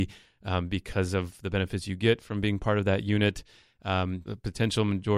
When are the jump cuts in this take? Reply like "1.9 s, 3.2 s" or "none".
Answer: 4.2 s